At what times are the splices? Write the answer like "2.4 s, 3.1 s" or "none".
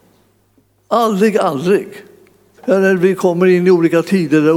2.6 s